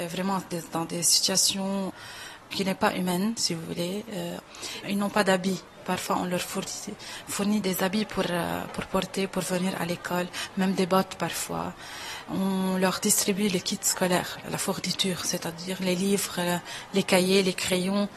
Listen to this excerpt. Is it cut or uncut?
uncut